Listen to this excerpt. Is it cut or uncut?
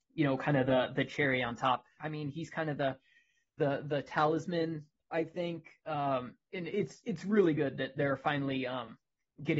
cut